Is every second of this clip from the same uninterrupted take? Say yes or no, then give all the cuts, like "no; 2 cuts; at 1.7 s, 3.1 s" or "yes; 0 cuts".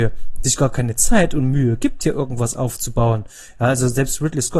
yes; 0 cuts